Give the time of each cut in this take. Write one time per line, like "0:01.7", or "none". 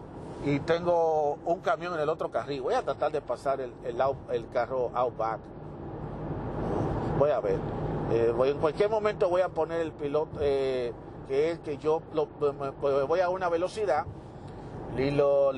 0:11.3